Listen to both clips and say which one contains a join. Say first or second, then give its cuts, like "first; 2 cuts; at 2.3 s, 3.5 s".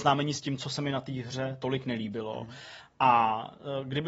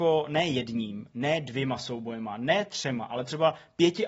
first; 1 cut; at 2.8 s